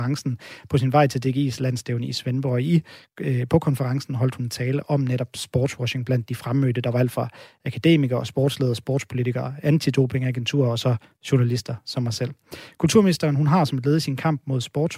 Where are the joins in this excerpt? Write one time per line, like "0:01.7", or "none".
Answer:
none